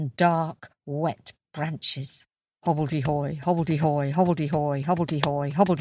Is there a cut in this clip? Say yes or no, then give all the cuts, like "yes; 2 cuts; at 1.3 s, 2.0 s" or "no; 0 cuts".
no; 0 cuts